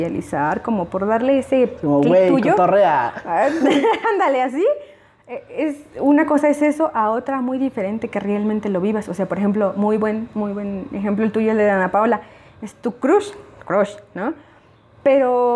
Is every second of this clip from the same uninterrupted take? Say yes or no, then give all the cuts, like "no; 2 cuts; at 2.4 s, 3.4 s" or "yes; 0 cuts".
yes; 0 cuts